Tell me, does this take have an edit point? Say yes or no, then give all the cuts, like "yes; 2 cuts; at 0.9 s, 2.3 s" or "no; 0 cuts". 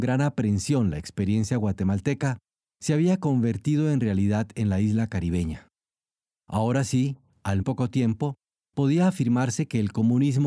yes; 1 cut; at 7.6 s